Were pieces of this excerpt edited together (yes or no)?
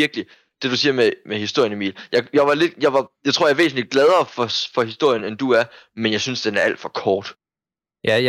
no